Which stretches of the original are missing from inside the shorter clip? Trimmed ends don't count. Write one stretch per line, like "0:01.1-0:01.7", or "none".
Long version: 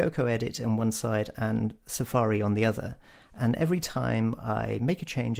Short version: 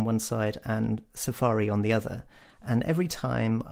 none